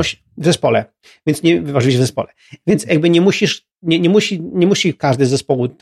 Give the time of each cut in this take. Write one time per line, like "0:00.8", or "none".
none